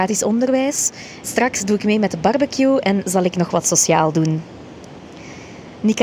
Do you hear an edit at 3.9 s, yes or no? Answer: no